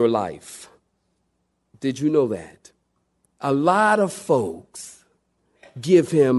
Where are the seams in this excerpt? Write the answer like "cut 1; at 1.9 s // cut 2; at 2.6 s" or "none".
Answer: cut 1; at 3.3 s